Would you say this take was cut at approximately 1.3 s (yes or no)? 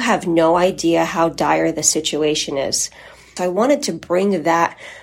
no